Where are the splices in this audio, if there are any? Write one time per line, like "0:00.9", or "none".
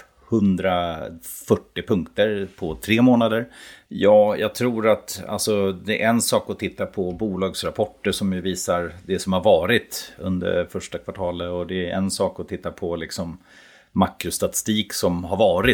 0:03.8

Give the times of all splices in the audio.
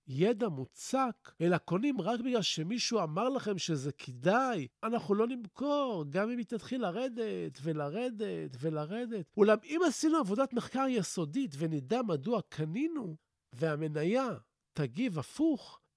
0:04.7

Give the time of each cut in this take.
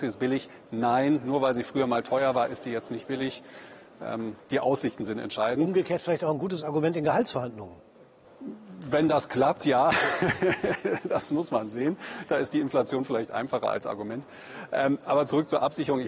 none

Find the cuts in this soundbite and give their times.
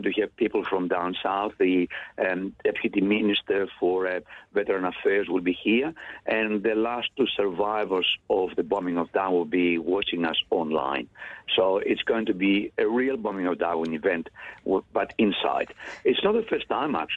none

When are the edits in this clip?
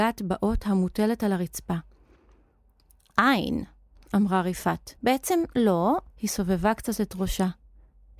0:05.0
0:06.1

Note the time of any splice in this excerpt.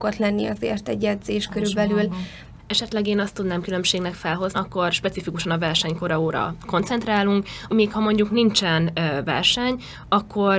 0:02.6
0:04.5
0:07.7

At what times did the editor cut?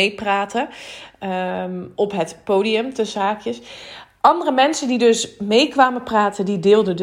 none

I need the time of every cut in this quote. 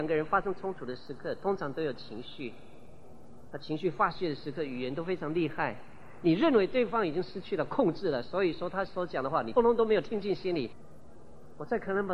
0:09.6

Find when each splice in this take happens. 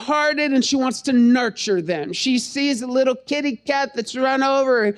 none

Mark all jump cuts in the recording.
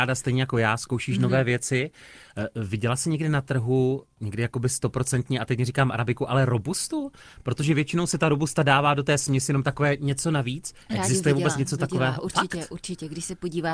none

